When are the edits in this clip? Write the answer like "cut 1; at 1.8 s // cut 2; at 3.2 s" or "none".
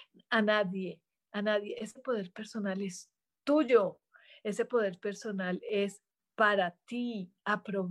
none